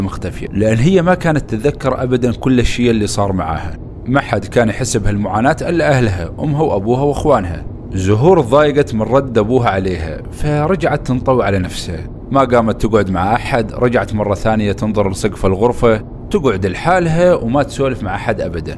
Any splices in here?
no; 0 cuts

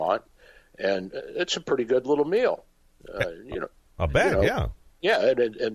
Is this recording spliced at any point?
no; 0 cuts

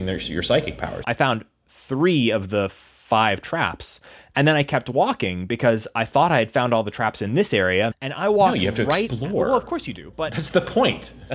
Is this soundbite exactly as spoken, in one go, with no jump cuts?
no; 2 cuts; at 1.0 s, 7.9 s

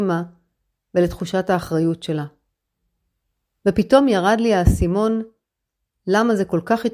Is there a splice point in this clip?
yes; 1 cut; at 3.6 s

